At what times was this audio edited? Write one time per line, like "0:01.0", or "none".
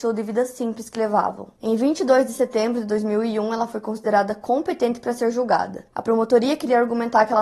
0:01.6